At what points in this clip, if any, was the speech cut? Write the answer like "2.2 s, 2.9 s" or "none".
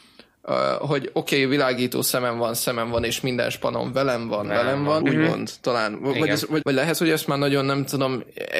5.0 s, 6.6 s